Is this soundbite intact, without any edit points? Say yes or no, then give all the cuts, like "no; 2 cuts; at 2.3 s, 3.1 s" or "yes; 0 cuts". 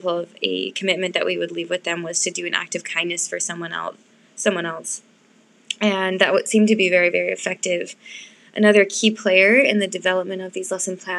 yes; 0 cuts